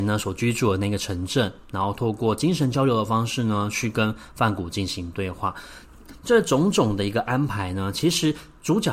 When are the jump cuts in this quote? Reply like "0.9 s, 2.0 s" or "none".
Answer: none